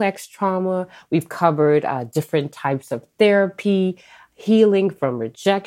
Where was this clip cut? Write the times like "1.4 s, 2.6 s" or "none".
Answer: none